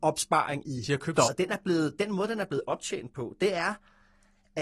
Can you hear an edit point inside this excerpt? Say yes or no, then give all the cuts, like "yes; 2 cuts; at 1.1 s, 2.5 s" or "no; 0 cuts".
yes; 1 cut; at 1.2 s